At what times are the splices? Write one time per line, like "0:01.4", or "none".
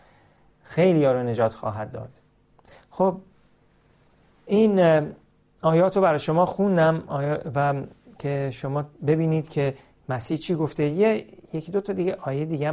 none